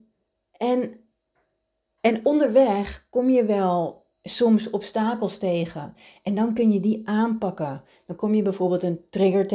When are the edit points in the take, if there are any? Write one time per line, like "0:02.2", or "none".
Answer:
0:04.1